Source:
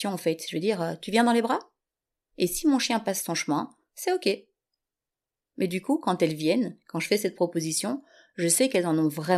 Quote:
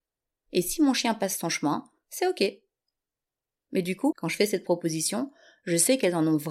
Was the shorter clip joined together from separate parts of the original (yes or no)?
yes